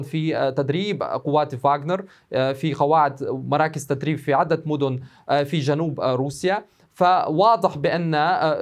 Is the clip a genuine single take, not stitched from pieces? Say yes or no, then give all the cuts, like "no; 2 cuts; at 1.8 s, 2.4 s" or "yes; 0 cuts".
yes; 0 cuts